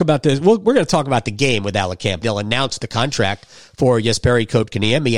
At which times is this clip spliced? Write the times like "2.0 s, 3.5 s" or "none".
2.2 s